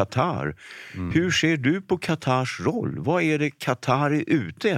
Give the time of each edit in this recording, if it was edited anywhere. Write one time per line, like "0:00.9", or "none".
none